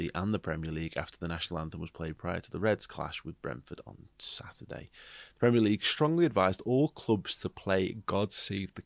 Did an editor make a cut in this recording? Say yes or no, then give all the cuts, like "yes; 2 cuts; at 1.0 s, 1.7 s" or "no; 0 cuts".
no; 0 cuts